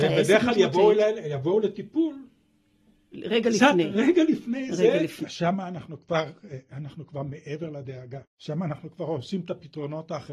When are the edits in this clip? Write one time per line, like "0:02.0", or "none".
0:05.2
0:08.3